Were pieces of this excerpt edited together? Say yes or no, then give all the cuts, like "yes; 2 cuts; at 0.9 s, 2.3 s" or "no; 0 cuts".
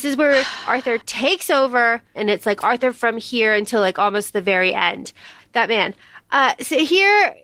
yes; 2 cuts; at 2.1 s, 5.4 s